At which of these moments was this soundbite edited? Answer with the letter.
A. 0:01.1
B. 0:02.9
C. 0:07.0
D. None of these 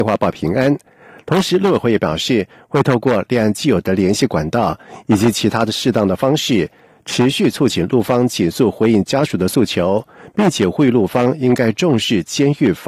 D